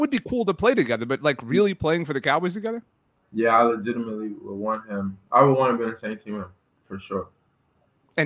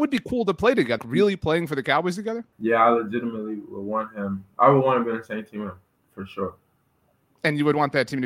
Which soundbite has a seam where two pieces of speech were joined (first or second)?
second